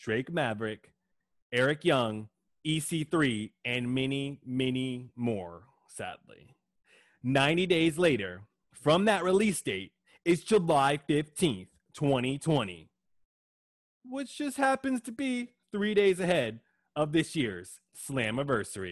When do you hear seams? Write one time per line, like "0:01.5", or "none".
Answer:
none